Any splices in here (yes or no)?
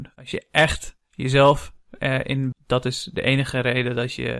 yes